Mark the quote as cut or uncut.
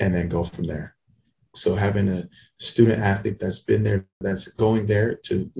cut